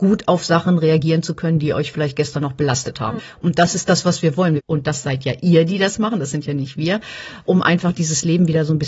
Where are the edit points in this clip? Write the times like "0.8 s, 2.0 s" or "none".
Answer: 4.6 s